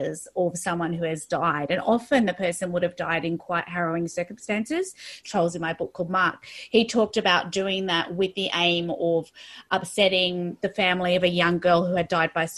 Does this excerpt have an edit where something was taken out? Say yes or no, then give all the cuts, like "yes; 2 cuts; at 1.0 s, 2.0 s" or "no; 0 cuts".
yes; 1 cut; at 5.2 s